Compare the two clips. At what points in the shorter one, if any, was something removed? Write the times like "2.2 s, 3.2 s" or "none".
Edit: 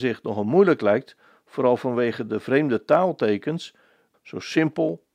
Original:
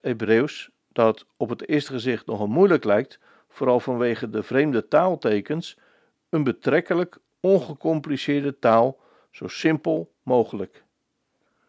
4.1 s